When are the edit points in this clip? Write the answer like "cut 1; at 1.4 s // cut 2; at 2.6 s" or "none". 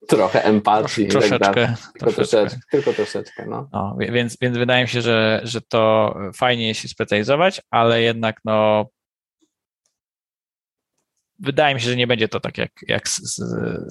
none